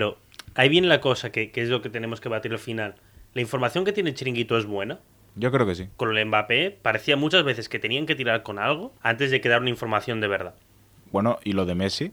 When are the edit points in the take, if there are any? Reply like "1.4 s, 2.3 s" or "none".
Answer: 5.9 s, 9.0 s